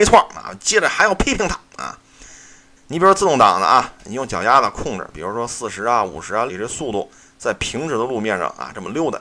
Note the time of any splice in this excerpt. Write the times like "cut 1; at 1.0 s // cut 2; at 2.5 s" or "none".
cut 1; at 2.8 s // cut 2; at 6.5 s